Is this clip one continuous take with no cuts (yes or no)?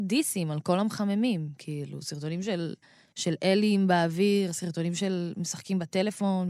yes